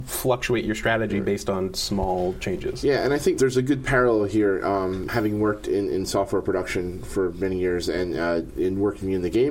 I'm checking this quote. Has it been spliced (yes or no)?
no